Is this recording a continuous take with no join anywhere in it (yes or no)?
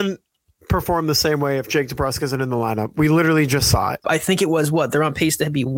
no